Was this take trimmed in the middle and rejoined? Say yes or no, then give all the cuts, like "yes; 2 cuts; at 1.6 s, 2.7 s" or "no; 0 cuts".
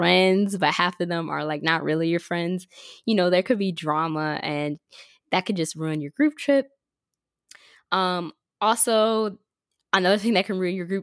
no; 0 cuts